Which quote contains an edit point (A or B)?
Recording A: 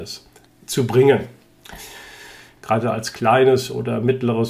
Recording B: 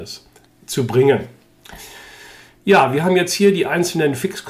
A